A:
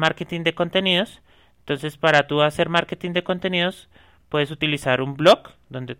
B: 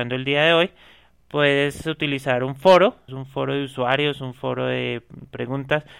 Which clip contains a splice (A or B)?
B